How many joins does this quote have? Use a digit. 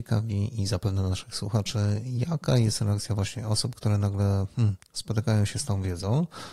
0